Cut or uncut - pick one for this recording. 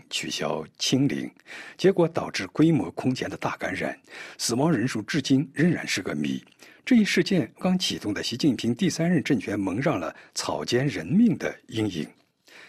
cut